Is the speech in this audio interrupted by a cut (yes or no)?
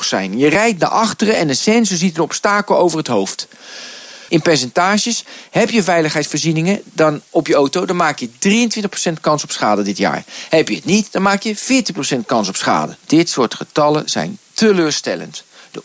yes